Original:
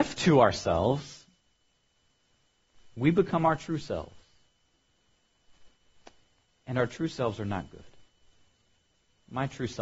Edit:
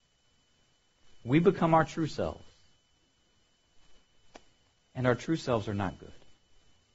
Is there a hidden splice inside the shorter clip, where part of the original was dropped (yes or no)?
no